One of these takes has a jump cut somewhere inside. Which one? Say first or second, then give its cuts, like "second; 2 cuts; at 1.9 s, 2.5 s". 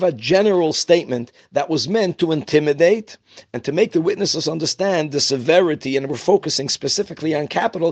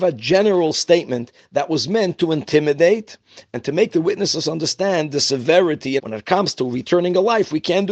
second; 1 cut; at 6.0 s